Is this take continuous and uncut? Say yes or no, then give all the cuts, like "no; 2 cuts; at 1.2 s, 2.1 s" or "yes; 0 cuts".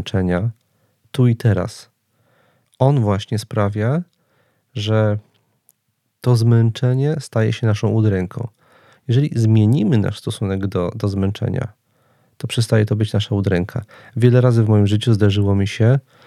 no; 1 cut; at 2.6 s